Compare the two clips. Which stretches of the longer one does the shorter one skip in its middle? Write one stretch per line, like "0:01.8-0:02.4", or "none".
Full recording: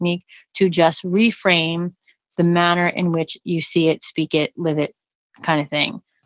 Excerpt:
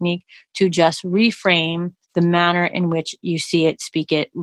0:02.0-0:02.2